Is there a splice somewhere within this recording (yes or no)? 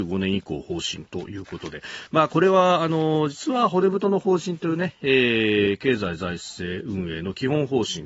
no